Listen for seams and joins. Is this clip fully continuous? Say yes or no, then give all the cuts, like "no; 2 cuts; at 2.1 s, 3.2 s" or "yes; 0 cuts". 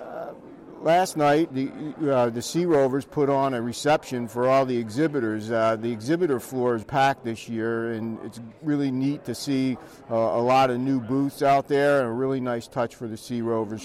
no; 2 cuts; at 1.5 s, 6.8 s